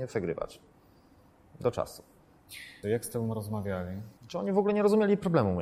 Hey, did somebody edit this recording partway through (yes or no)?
yes